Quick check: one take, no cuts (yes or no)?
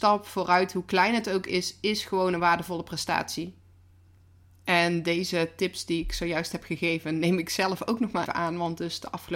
no